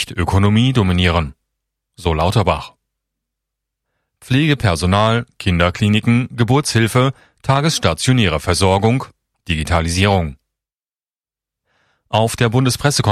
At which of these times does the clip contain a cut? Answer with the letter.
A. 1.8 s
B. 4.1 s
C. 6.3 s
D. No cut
B